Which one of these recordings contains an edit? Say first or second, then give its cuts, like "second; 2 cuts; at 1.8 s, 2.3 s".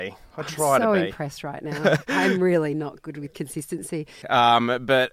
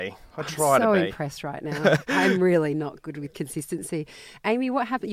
first; 1 cut; at 4.2 s